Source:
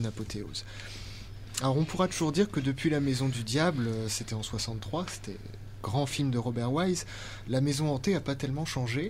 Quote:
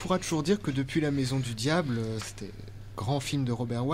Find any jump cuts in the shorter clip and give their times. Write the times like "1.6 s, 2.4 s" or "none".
2.2 s